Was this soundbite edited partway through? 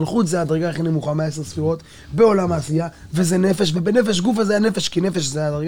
no; 0 cuts

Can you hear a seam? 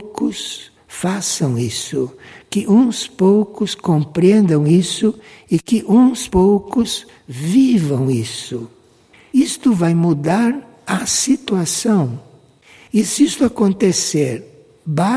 no; 0 cuts

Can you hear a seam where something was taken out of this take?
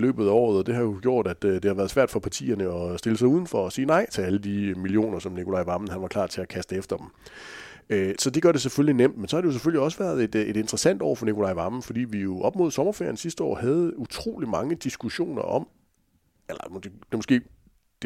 yes; 1 cut; at 8.2 s

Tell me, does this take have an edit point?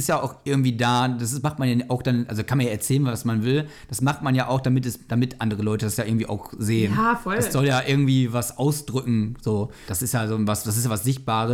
no; 0 cuts

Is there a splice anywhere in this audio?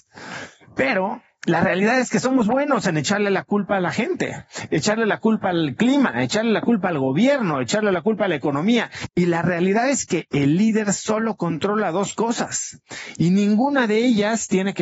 yes; 1 cut; at 2.4 s

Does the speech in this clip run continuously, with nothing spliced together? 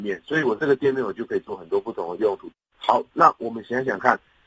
no; 1 cut; at 2.7 s

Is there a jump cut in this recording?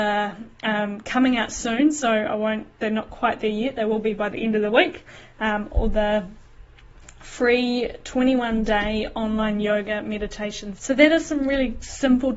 yes; 1 cut; at 10.8 s

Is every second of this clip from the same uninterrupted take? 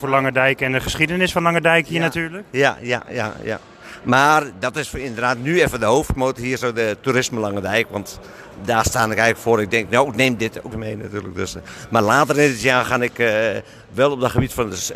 no; 1 cut; at 10.7 s

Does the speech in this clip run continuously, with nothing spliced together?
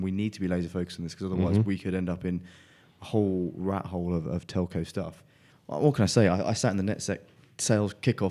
no; 1 cut; at 5.5 s

